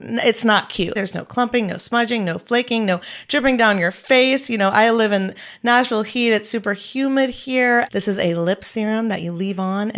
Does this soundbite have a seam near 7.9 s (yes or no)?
yes